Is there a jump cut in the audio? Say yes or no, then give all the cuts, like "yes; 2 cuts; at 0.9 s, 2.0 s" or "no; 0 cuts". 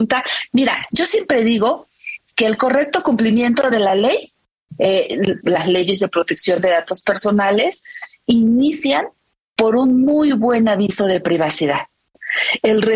yes; 1 cut; at 5.4 s